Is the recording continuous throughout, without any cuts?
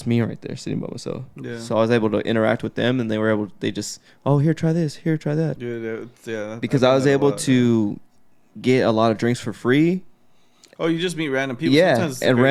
no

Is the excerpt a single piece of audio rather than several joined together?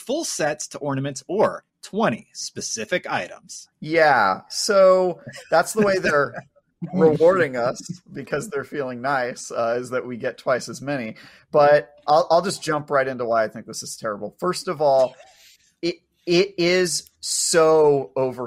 no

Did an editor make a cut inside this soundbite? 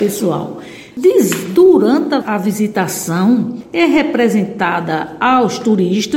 yes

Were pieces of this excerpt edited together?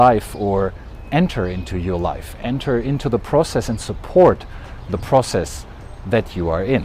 no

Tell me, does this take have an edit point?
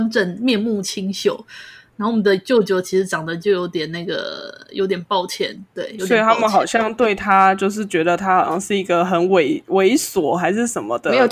no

